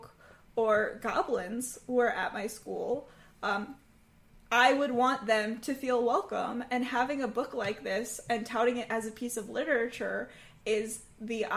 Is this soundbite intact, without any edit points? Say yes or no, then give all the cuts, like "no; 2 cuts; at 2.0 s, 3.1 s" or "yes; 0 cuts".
yes; 0 cuts